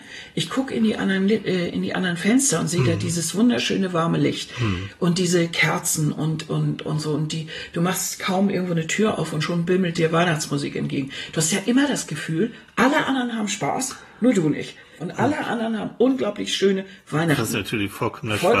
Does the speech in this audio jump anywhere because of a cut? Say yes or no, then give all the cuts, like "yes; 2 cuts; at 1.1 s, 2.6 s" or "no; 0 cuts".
yes; 1 cut; at 15.0 s